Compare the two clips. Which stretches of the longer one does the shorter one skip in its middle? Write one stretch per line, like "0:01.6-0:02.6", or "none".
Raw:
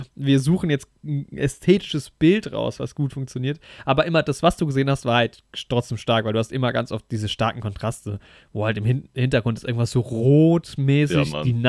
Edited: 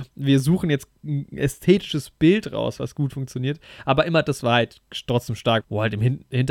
0:04.4-0:05.0
0:06.2-0:08.4